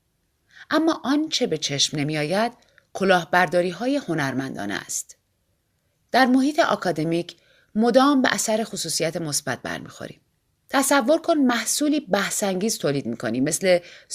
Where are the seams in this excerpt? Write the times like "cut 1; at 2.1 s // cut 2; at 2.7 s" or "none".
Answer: cut 1; at 5.9 s // cut 2; at 10.6 s